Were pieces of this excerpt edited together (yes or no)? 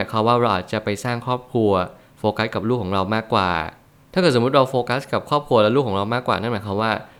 no